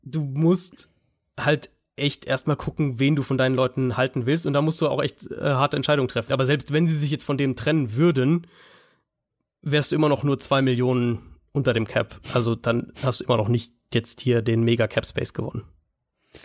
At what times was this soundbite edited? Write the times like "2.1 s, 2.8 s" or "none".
6.3 s